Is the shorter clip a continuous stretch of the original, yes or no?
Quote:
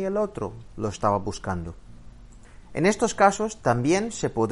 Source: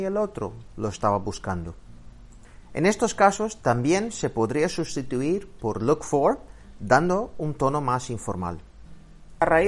yes